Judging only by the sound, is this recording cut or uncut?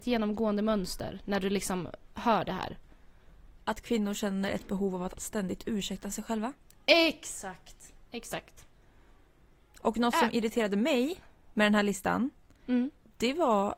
uncut